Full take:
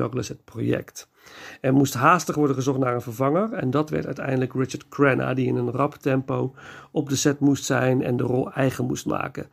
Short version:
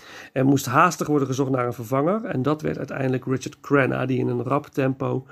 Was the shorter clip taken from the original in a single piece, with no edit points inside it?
yes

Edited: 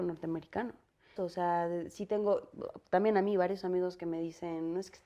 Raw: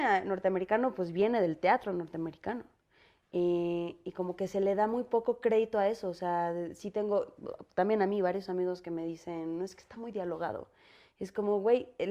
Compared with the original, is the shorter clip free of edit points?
no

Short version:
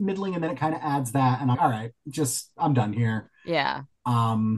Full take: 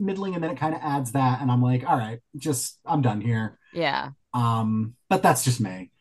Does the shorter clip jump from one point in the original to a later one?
yes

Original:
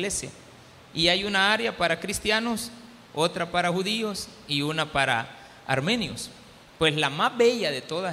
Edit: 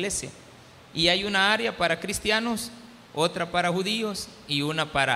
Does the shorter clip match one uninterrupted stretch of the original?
yes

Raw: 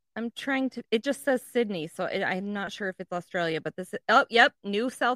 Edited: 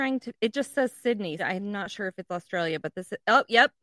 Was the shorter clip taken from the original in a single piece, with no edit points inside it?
no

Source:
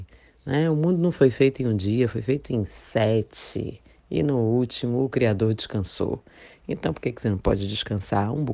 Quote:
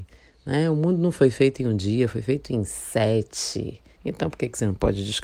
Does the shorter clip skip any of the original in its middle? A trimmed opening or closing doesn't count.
yes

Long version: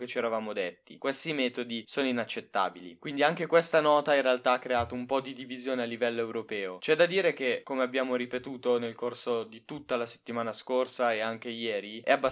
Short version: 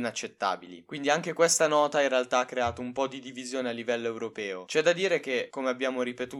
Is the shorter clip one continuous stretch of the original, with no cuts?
yes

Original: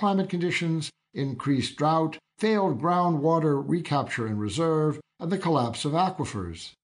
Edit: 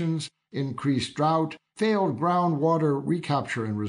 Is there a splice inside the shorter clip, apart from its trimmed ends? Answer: no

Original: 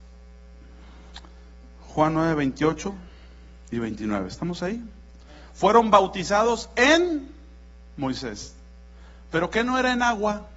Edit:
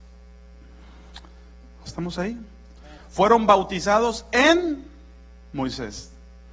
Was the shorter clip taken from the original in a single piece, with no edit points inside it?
no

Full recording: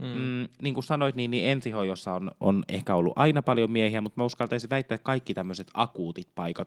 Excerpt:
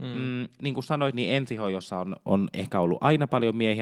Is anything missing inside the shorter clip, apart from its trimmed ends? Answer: yes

